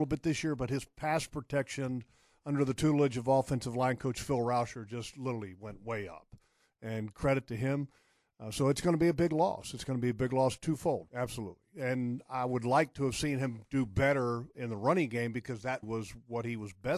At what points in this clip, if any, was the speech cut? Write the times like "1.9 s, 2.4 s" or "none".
11.1 s, 14.5 s, 15.8 s